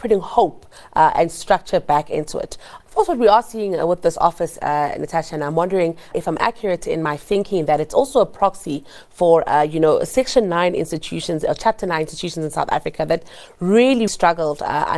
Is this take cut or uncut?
cut